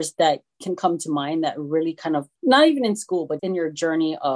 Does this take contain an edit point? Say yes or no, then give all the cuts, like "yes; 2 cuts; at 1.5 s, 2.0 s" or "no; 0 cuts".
yes; 2 cuts; at 2.4 s, 3.4 s